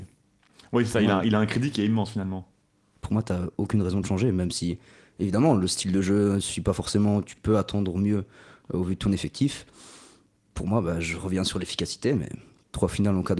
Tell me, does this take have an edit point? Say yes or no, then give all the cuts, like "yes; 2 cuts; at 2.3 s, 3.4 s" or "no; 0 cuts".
no; 0 cuts